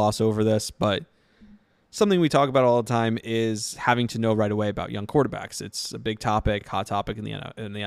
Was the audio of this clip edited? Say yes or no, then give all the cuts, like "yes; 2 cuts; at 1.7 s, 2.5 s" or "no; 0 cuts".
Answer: no; 0 cuts